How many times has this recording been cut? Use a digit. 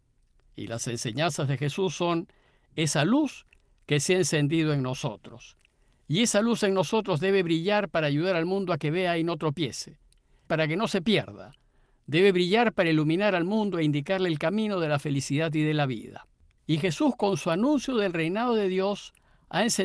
2